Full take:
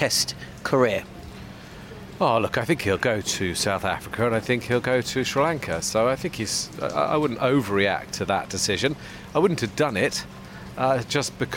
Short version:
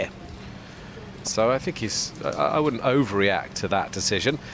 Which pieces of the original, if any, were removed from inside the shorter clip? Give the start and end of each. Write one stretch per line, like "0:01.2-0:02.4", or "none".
0:02.2-0:05.8